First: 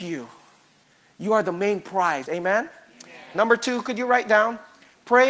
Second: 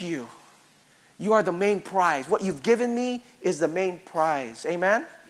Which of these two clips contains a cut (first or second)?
first